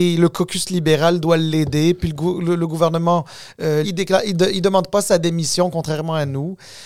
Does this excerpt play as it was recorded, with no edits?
no; 1 cut; at 3.8 s

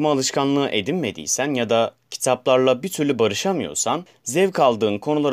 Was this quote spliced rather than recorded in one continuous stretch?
no; 0 cuts

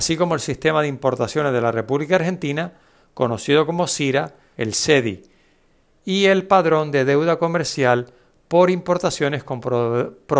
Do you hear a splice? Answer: yes; 1 cut; at 4.5 s

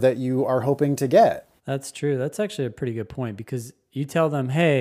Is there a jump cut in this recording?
yes; 1 cut; at 1.6 s

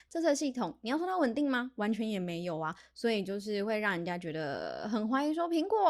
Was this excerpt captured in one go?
yes; 0 cuts

